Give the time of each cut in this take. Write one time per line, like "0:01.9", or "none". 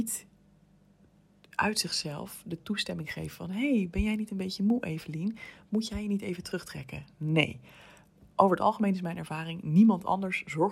none